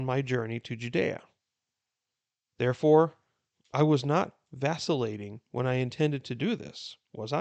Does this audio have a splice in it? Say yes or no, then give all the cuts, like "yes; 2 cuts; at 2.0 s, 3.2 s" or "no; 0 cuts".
no; 0 cuts